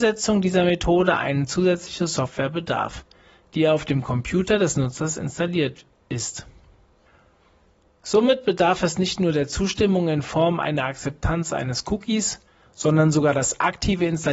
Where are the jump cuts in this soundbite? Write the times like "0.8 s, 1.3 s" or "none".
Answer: none